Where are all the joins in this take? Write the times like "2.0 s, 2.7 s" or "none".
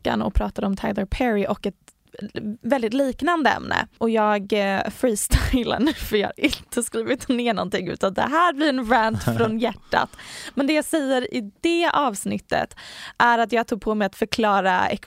none

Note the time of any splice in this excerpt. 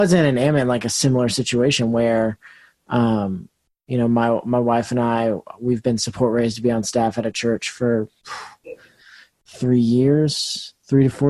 none

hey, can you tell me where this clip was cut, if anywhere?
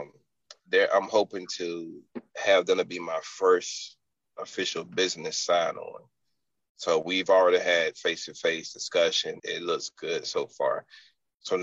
9.4 s

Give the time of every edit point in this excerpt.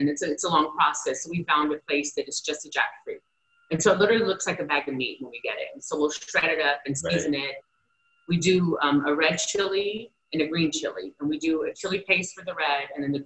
none

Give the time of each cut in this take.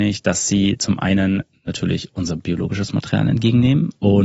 none

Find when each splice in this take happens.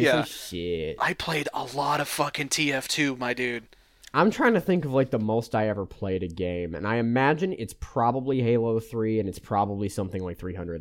none

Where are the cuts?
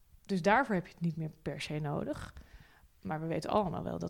none

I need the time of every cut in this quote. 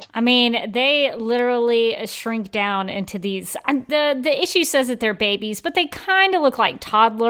3.9 s

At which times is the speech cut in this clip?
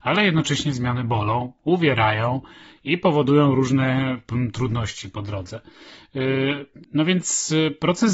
6.8 s

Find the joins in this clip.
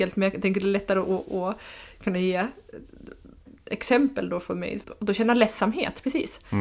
4.8 s

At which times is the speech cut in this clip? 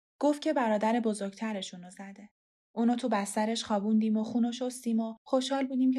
2.6 s

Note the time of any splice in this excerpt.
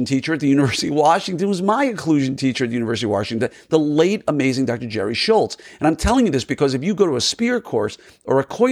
none

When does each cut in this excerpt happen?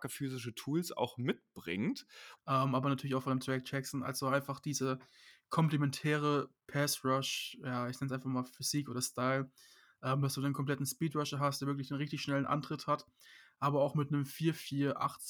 2.4 s

